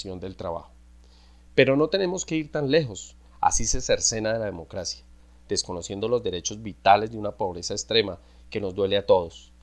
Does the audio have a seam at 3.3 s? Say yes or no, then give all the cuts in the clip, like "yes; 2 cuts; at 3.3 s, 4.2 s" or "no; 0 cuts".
yes; 1 cut; at 3.3 s